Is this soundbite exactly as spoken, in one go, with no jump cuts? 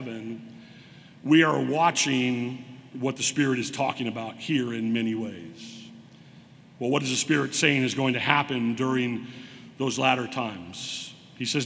yes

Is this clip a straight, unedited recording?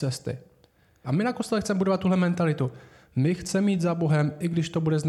no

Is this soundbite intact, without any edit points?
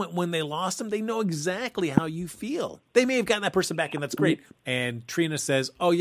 no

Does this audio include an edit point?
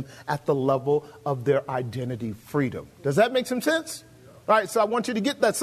no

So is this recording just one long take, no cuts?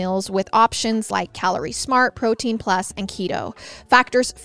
yes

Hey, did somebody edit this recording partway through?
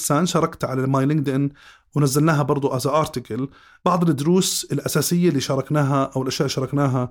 no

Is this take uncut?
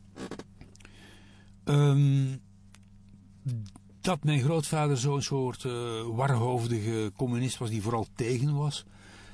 yes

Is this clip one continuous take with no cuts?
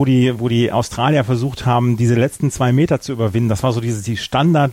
yes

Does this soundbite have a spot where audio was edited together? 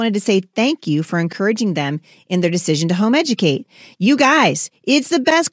no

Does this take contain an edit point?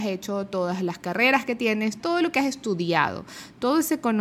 yes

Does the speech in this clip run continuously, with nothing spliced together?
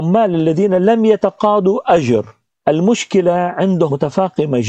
yes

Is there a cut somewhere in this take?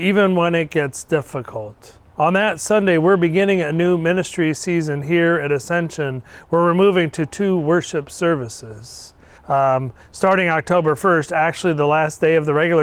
yes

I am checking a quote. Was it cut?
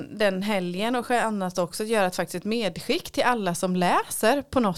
no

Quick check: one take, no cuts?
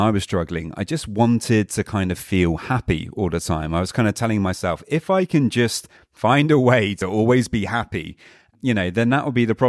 yes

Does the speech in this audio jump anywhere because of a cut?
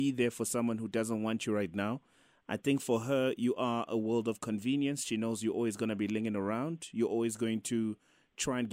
no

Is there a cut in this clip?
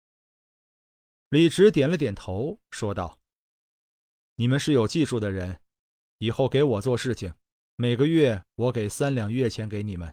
no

